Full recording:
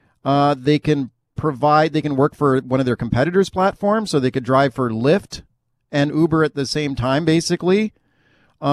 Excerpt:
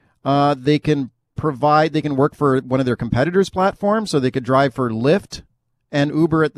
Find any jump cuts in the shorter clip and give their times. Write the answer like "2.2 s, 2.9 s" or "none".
none